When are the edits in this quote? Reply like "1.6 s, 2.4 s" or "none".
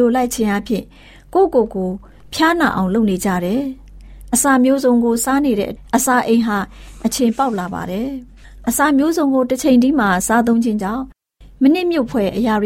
none

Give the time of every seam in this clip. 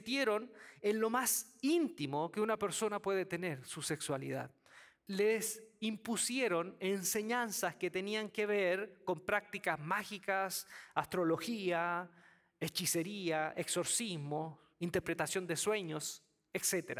5.1 s

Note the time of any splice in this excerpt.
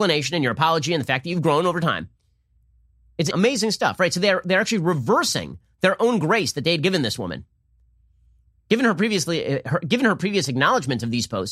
3.3 s

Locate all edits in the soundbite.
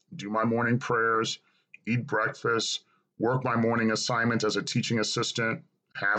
none

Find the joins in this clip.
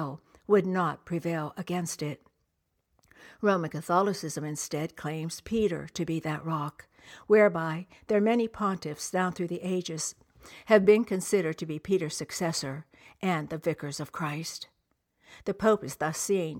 none

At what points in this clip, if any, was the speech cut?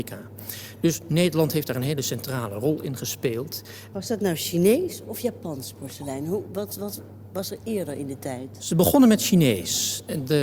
none

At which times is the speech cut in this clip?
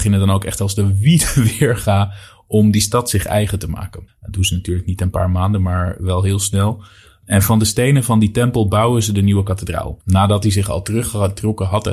4.1 s, 10.0 s

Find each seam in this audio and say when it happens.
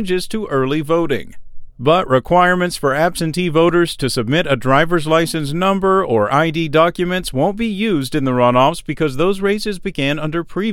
1.7 s

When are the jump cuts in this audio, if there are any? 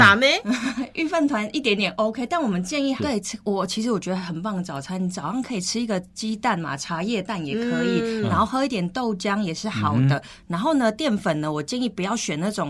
3.0 s

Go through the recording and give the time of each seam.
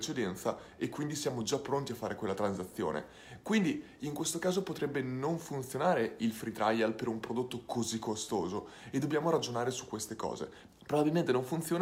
10.7 s

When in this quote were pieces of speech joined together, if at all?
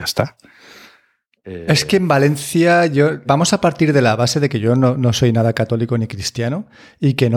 3.2 s

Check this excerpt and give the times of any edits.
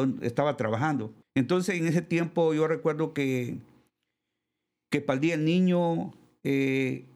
1.2 s

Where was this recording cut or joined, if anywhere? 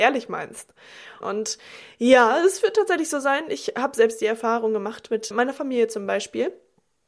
1.2 s, 5.3 s

